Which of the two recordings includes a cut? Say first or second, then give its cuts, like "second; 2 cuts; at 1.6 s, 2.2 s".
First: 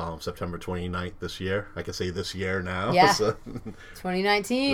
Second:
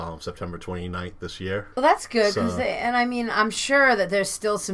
second; 1 cut; at 1.7 s